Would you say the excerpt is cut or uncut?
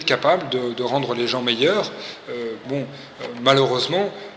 cut